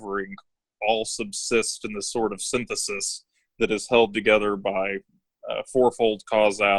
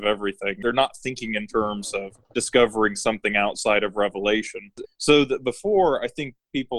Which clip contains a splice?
second; 2 cuts; at 2.2 s, 4.8 s

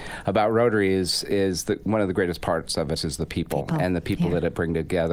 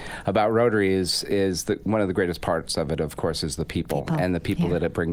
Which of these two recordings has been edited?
first; 1 cut; at 3.0 s

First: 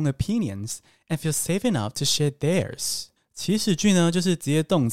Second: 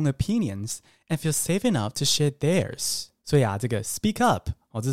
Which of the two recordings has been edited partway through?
first; 1 cut; at 3.2 s

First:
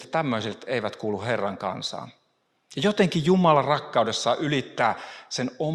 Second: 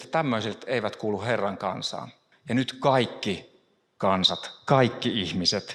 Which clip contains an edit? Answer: second; 1 cut; at 2.3 s

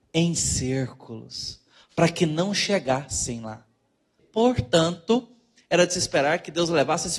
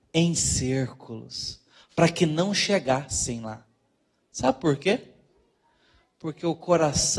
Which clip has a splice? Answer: first; 1 cut; at 4.2 s

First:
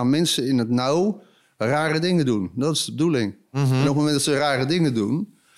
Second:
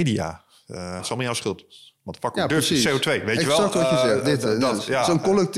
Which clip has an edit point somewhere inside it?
second; 1 cut; at 1.0 s

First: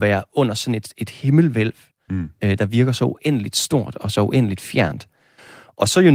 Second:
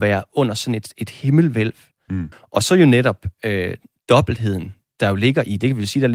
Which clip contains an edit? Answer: second; 1 cut; at 2.3 s

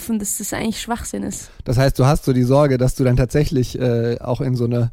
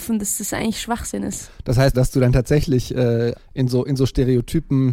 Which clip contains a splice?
second; 2 cuts; at 1.9 s, 3.3 s

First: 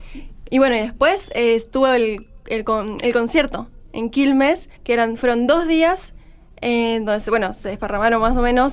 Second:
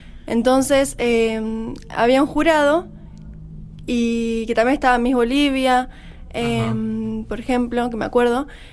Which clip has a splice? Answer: first; 1 cut; at 4.7 s

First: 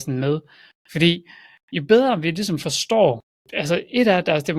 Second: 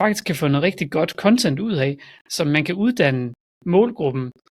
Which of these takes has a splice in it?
first; 1 cut; at 3.4 s

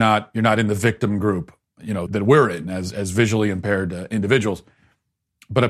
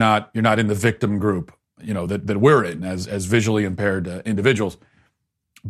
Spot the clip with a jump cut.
first; 1 cut; at 2.1 s

